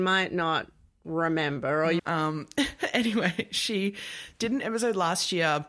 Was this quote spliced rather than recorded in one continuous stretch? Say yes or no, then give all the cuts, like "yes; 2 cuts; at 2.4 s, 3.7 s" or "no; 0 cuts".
yes; 1 cut; at 2.0 s